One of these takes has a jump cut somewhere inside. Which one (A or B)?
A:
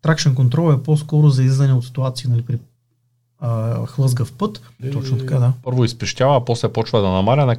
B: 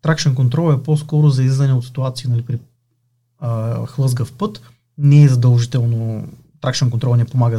A